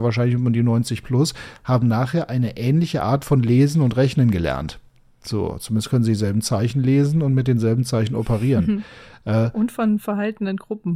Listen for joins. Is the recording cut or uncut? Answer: uncut